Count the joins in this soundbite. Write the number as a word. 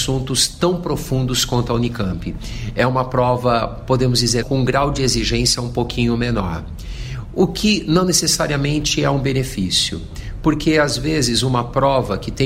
one